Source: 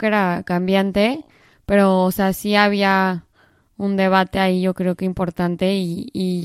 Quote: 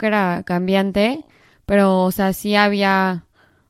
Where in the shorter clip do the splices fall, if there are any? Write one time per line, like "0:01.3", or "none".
none